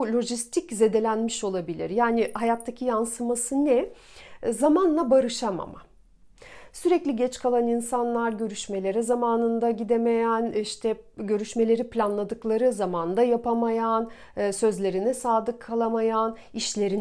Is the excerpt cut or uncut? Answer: uncut